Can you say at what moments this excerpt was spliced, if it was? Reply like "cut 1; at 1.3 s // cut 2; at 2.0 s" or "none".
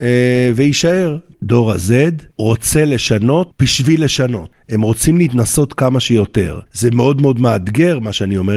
cut 1; at 2.3 s // cut 2; at 6.7 s

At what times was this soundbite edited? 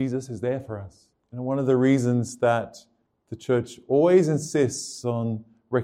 cut 1; at 1.2 s

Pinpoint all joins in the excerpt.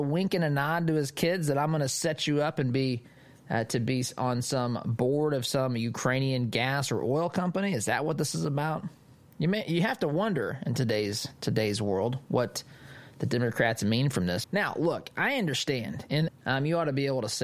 cut 1; at 14.4 s // cut 2; at 16.3 s

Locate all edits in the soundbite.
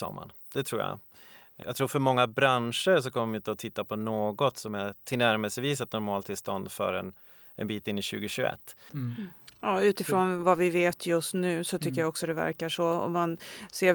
cut 1; at 1.6 s // cut 2; at 8.9 s

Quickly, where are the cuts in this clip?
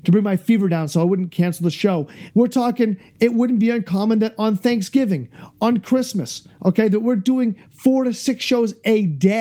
cut 1; at 2.3 s

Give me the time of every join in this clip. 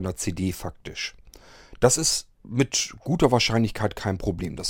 cut 1; at 2.3 s

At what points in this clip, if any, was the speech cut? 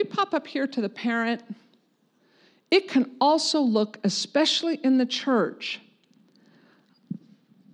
none

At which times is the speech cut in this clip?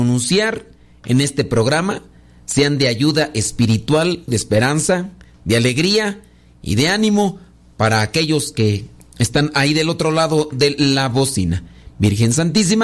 cut 1; at 4.3 s

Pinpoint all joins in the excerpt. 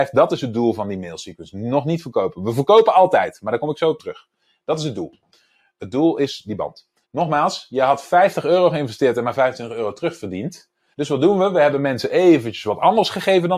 cut 1; at 7.0 s // cut 2; at 10.9 s

